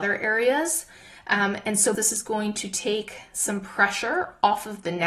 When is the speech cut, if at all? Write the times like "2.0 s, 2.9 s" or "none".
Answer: 1.9 s